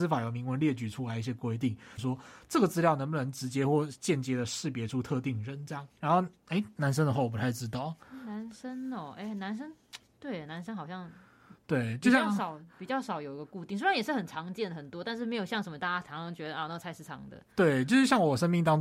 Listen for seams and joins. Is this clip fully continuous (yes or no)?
no